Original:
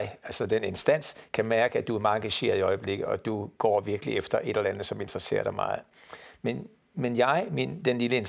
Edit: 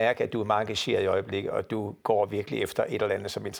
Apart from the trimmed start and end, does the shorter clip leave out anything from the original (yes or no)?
no